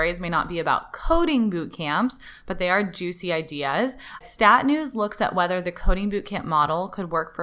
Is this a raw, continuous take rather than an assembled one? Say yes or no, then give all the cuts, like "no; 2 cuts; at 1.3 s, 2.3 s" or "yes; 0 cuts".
yes; 0 cuts